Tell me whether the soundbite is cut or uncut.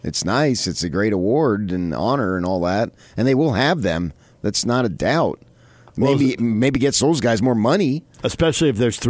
cut